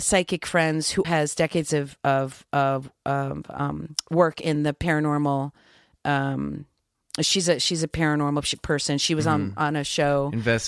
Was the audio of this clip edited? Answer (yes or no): yes